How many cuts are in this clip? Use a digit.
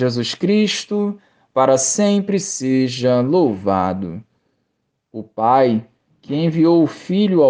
0